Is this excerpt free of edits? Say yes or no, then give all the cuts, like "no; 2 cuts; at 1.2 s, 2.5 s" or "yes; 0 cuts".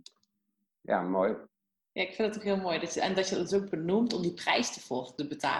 yes; 0 cuts